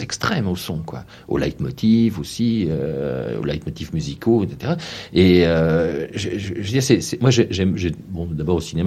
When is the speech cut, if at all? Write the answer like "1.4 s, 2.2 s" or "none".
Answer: none